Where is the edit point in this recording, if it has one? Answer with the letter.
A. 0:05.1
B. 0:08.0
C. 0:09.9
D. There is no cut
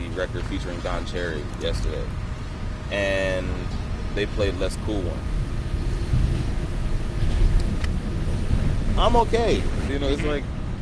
C